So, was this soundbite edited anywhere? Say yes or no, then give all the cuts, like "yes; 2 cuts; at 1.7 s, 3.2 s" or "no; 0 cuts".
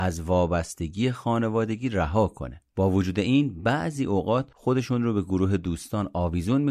yes; 1 cut; at 2.7 s